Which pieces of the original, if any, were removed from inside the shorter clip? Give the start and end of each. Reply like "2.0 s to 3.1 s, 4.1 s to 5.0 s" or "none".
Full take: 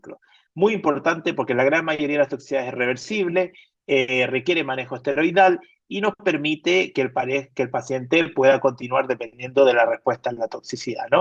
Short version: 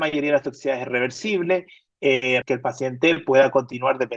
4.3 s to 7.5 s